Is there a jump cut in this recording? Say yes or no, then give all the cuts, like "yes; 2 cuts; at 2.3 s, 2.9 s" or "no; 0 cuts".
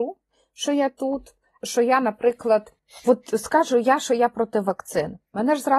yes; 1 cut; at 1.6 s